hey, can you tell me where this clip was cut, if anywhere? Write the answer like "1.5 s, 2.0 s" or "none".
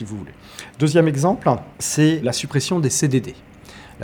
1.7 s